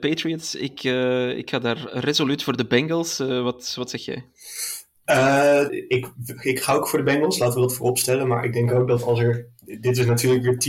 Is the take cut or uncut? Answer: cut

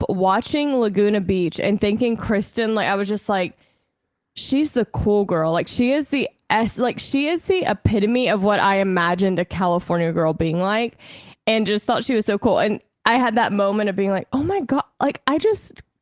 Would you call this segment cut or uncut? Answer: uncut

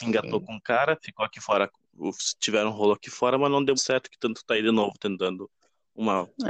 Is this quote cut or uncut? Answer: cut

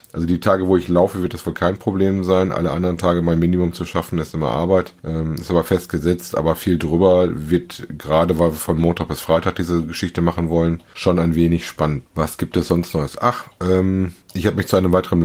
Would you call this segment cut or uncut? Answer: uncut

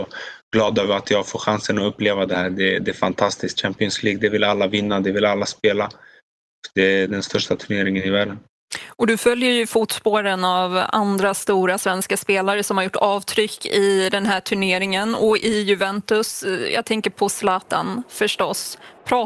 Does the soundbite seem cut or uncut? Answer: uncut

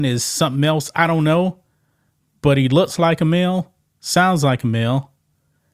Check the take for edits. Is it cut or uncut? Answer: uncut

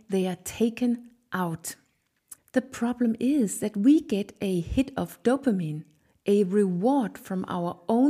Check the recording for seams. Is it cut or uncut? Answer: cut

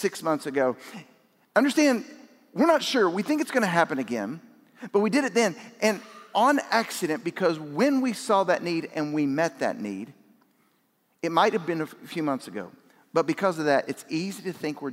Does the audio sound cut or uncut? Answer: uncut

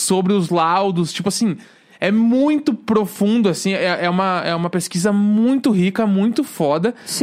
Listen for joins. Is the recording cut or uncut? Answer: uncut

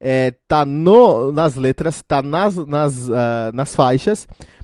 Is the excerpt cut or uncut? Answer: uncut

